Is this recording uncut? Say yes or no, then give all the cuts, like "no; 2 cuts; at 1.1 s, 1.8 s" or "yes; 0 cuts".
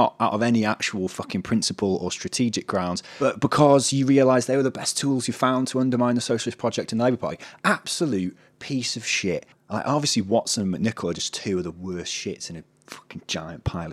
no; 1 cut; at 9.5 s